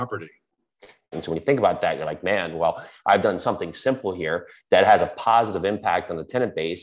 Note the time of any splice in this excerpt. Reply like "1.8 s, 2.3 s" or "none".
1.1 s